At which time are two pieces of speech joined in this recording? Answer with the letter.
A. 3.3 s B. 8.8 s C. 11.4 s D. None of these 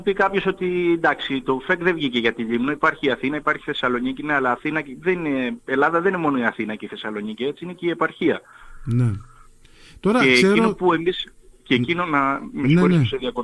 D